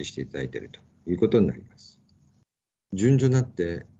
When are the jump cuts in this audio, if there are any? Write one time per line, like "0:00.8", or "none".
0:02.8